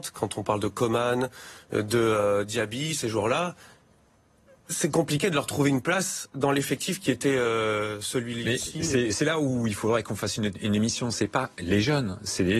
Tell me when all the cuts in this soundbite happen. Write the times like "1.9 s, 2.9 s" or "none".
none